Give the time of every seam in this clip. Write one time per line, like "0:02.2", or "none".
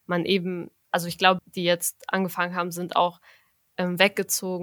0:01.4